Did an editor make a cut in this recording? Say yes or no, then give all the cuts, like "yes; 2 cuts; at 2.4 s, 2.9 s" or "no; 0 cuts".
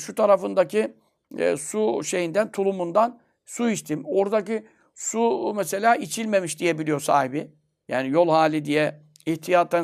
no; 0 cuts